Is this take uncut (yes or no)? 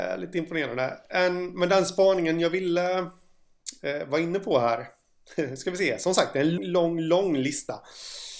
no